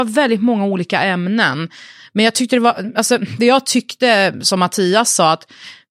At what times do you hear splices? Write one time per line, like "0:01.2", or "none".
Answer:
none